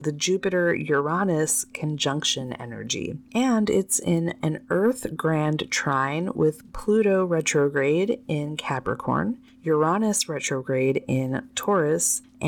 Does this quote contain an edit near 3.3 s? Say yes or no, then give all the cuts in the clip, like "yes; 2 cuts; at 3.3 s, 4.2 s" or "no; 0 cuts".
yes; 1 cut; at 3.3 s